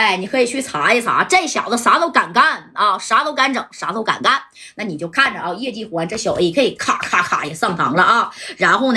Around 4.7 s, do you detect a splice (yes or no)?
no